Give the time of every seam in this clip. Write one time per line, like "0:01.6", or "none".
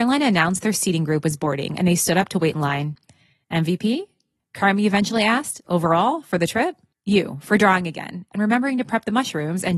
0:05.6
0:06.9